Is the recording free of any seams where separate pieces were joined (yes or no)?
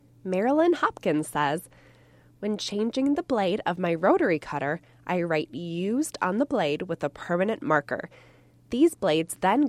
yes